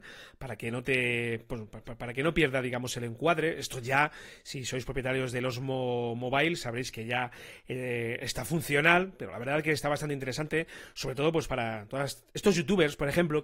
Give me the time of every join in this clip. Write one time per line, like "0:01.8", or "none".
none